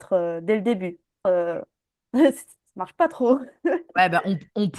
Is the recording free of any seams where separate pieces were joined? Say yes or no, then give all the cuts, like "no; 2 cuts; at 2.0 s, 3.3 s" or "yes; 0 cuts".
no; 1 cut; at 1.2 s